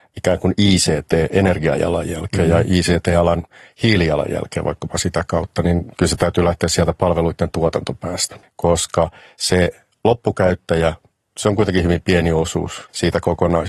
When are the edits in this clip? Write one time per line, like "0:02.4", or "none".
0:08.4